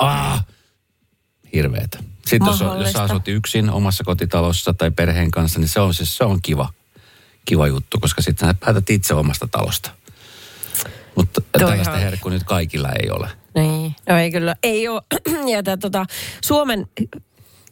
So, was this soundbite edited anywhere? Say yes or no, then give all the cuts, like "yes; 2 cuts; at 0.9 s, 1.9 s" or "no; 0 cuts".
no; 0 cuts